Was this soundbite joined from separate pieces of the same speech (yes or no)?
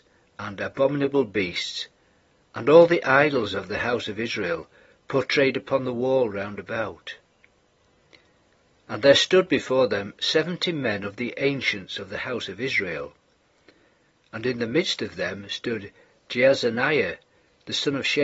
no